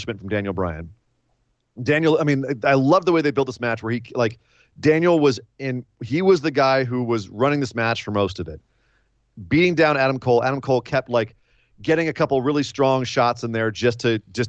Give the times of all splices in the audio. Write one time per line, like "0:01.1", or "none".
none